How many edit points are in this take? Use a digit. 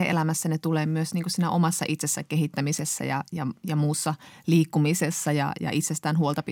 0